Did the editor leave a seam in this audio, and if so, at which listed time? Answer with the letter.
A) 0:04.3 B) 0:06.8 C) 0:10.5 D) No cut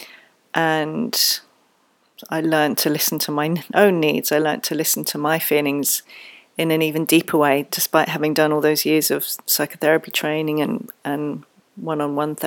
D